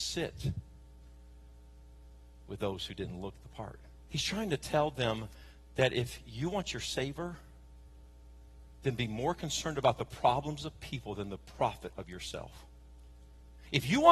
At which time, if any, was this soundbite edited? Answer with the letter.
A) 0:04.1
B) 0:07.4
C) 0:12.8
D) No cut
A